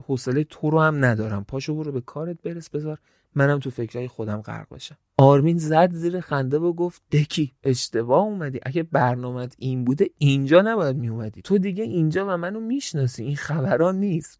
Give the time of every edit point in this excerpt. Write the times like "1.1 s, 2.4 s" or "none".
5.1 s